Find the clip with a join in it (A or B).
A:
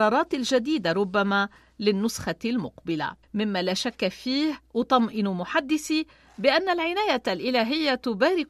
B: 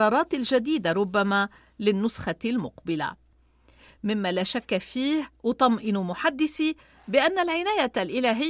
A